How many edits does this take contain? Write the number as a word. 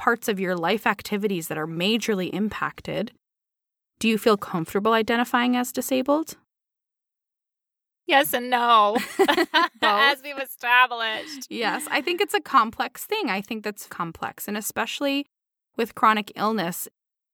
one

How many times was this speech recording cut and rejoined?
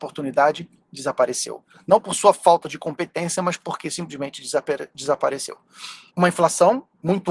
one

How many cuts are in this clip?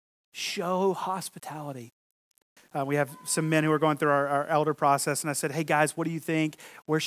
one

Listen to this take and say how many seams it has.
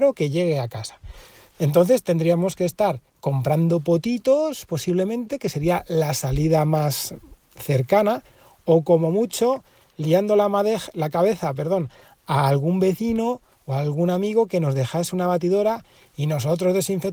zero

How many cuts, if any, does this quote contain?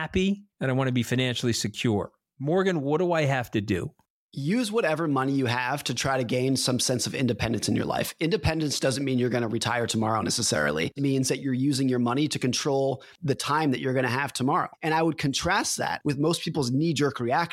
two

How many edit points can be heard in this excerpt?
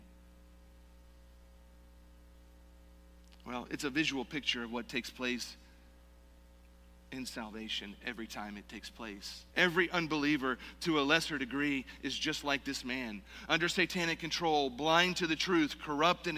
one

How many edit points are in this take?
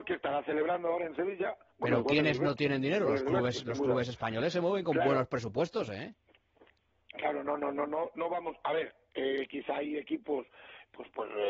zero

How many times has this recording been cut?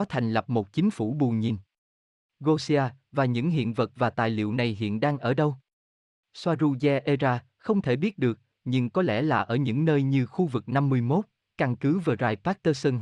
zero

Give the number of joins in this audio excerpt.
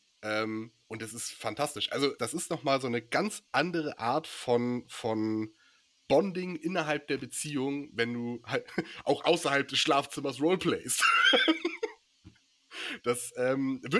one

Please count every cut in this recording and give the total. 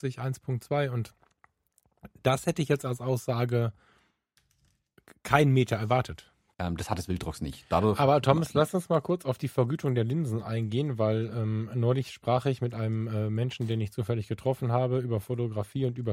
one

